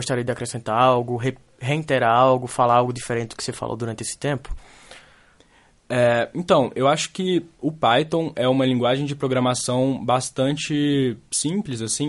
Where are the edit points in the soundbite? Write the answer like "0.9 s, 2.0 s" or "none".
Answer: none